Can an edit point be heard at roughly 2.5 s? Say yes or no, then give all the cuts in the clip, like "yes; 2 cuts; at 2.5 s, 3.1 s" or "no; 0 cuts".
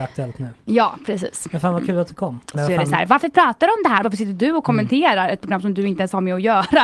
yes; 2 cuts; at 2.5 s, 4.0 s